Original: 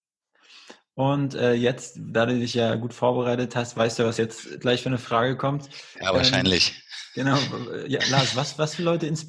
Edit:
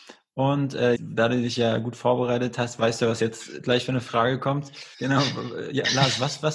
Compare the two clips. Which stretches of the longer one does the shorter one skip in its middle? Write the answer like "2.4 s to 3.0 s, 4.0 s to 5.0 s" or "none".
1.6 s to 1.9 s, 5.9 s to 7.1 s